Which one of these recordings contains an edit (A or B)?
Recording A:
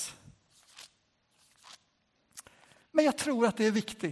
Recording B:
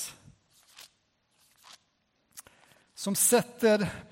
A